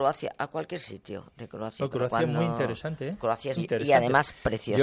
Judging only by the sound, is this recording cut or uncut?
cut